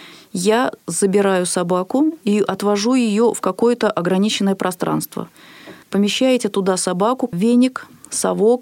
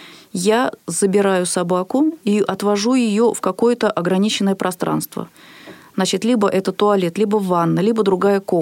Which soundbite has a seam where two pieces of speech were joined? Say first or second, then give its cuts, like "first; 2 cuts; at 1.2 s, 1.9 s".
first; 2 cuts; at 5.8 s, 7.3 s